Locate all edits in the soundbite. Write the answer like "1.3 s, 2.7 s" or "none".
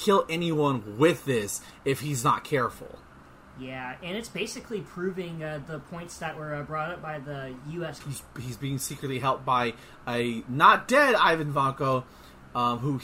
8.0 s